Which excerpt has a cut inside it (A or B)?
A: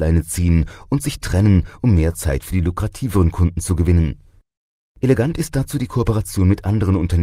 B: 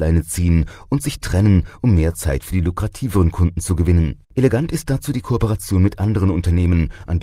B